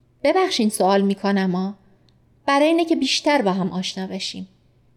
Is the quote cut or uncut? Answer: uncut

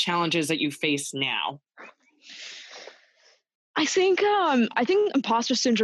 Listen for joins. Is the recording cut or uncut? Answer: uncut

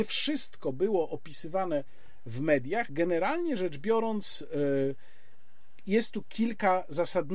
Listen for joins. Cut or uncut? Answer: uncut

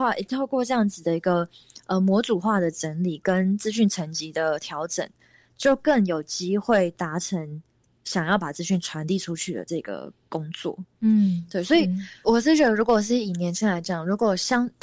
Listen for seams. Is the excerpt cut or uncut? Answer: cut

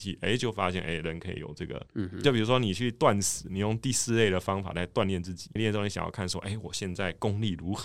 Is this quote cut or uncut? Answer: cut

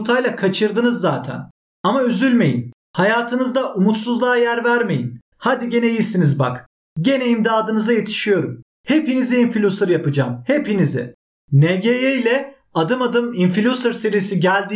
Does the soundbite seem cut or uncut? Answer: cut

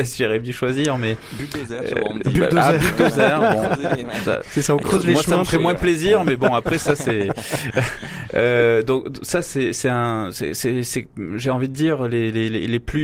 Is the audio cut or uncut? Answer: uncut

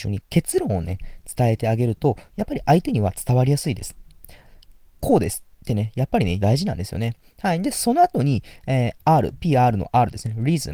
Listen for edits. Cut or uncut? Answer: cut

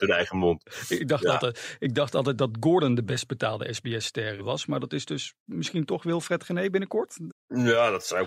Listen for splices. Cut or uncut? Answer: cut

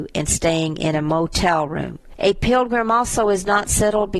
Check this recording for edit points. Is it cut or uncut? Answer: cut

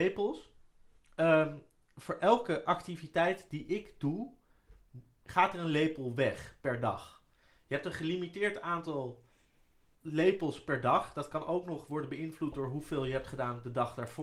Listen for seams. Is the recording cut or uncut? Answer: uncut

